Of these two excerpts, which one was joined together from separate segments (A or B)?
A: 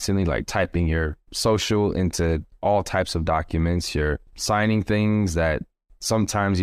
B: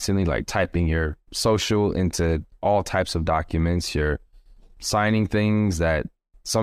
A